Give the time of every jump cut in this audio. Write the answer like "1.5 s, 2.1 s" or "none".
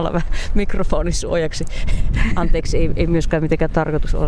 none